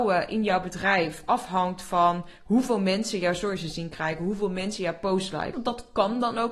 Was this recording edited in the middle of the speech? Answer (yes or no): yes